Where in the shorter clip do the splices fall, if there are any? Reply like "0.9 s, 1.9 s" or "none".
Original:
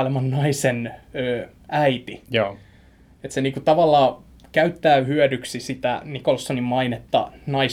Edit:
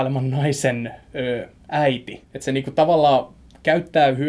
2.2 s